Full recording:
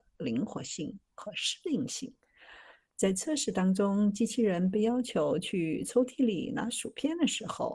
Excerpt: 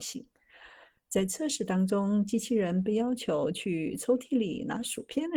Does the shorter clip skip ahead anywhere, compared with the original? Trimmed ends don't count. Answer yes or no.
no